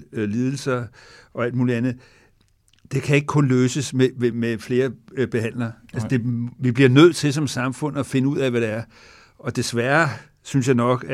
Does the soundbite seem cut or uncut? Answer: cut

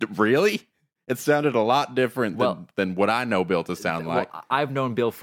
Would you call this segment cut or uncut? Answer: uncut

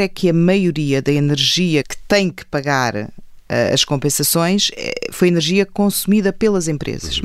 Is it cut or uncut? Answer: cut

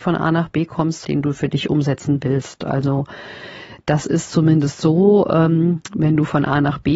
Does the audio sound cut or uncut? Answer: cut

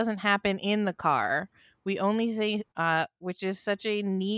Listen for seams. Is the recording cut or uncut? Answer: cut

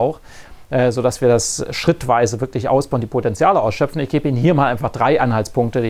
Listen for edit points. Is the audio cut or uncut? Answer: uncut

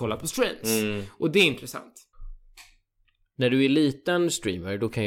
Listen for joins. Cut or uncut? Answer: uncut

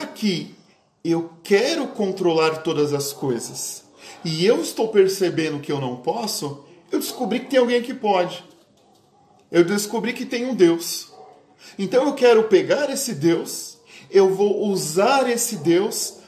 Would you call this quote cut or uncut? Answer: uncut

